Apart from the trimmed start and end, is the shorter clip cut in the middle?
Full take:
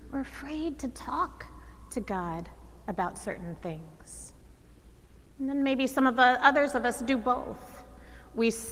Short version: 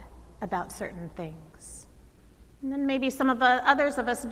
yes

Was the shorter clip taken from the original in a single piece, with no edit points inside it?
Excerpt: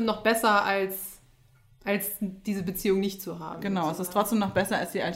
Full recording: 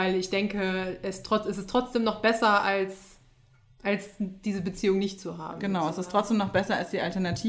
yes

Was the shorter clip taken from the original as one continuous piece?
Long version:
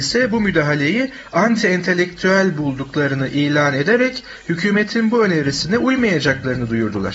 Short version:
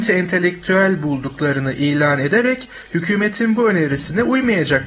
yes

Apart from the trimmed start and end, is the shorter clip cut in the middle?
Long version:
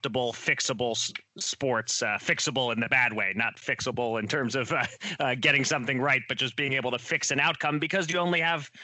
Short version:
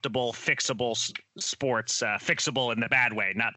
no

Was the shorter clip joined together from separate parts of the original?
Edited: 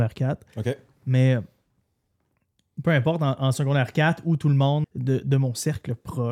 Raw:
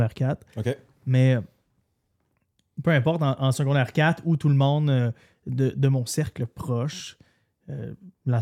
yes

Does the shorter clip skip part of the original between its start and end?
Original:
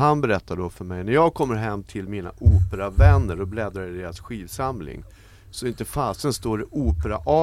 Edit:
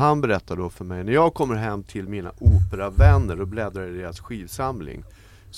no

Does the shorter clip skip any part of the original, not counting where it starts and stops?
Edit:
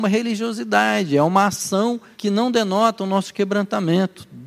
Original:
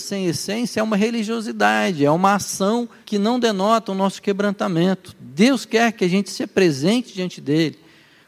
no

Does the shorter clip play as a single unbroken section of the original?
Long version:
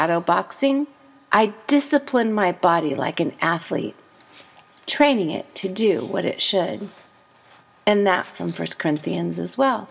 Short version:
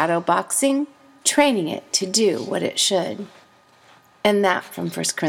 no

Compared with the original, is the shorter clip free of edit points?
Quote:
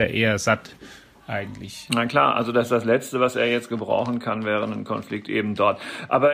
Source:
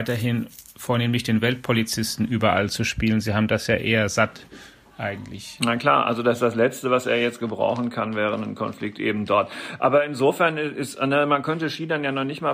yes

